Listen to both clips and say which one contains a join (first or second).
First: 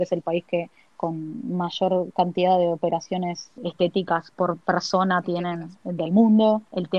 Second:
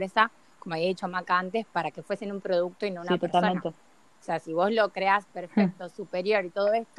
first